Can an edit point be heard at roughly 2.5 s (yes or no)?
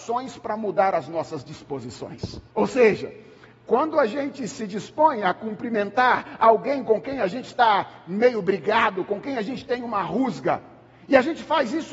yes